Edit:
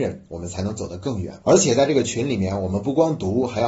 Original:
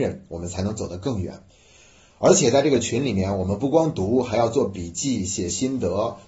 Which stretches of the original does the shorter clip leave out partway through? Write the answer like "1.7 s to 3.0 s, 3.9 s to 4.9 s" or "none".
1.4 s to 2.2 s